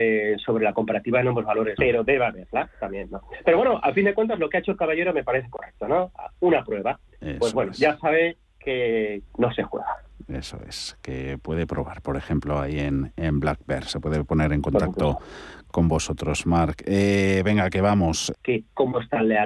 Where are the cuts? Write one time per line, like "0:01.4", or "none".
0:01.8
0:09.3
0:18.3